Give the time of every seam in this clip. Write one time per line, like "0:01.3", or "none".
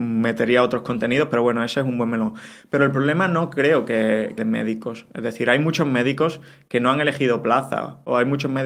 0:04.4